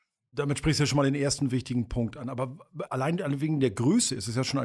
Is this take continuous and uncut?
no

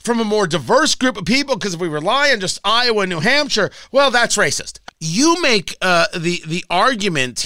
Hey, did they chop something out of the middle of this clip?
yes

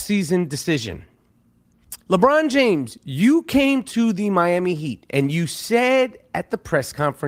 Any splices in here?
yes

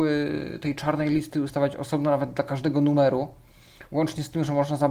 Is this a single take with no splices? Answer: yes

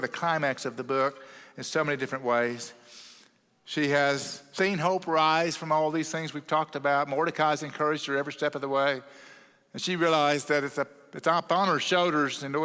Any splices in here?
no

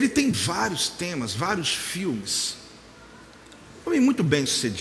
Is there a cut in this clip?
no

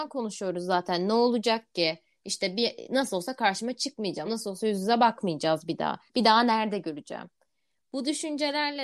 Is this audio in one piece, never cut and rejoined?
yes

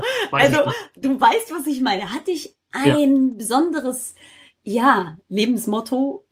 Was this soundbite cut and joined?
no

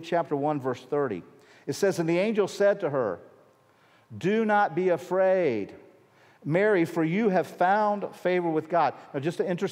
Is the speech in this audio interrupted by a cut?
no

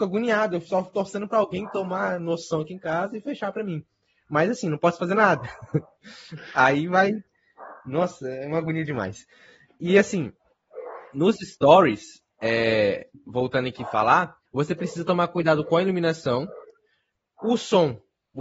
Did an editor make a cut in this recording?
yes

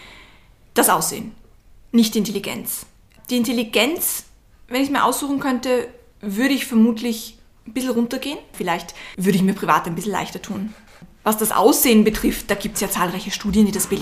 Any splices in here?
no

